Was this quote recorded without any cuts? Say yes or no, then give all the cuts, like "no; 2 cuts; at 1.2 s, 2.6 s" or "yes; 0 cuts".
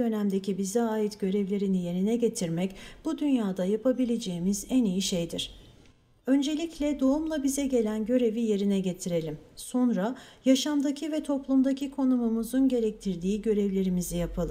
yes; 0 cuts